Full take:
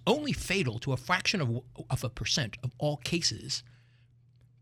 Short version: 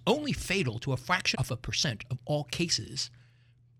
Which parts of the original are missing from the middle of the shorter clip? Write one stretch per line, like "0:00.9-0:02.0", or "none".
0:01.3-0:01.9